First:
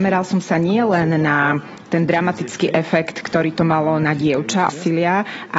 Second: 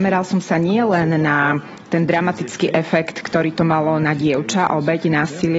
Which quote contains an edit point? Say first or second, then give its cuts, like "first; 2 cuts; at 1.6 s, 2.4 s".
first; 1 cut; at 4.7 s